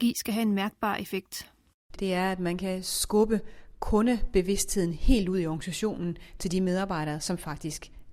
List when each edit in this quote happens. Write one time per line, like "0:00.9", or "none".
0:02.0